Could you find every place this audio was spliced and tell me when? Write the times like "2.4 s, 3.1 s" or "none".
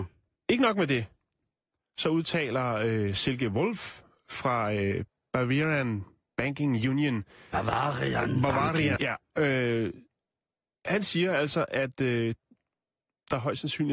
9.0 s